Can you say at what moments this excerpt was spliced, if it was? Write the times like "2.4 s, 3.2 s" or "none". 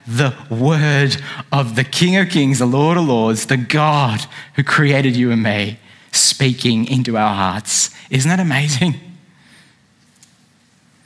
none

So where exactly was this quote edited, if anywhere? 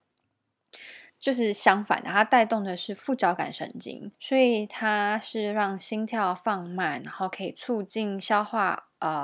1.1 s, 4.1 s

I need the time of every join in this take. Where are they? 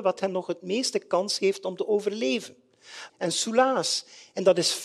3.1 s

